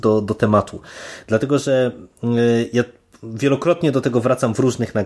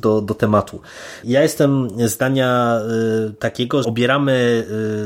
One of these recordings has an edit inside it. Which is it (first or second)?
second